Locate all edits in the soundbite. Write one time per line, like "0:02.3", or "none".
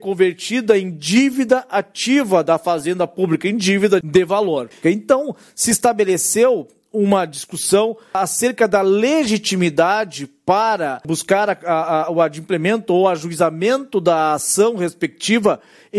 0:04.8